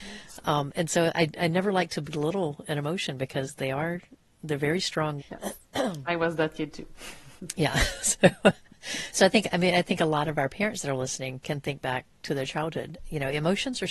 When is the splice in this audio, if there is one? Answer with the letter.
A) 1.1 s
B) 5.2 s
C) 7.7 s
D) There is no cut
B